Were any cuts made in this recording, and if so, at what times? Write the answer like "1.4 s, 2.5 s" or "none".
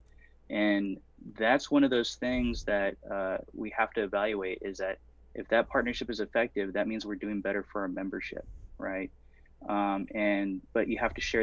none